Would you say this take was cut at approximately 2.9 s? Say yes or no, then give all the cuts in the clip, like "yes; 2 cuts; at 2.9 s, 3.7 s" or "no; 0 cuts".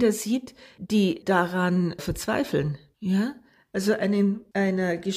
no; 0 cuts